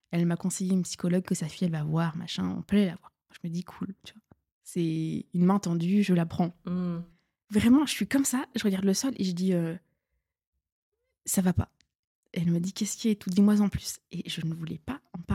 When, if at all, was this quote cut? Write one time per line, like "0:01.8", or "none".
0:07.4